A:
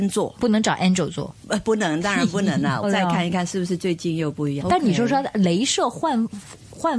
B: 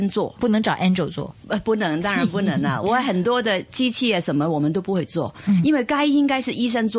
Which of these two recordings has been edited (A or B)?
A